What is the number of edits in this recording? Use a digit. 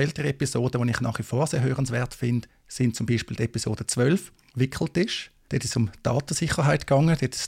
0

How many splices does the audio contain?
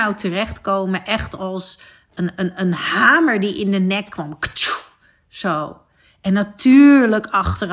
0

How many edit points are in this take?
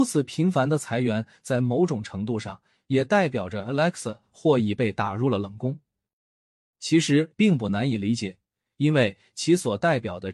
1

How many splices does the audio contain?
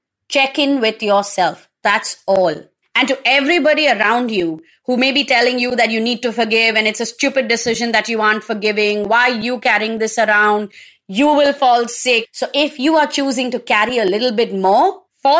1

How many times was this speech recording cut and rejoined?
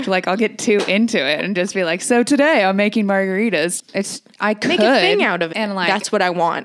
2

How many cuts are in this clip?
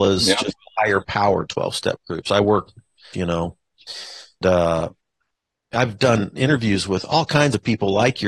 2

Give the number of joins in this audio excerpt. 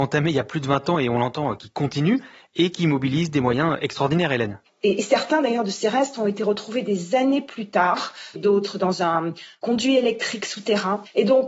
2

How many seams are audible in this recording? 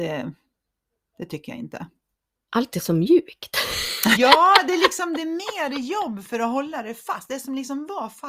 1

